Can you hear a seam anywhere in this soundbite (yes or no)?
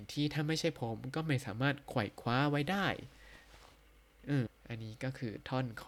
yes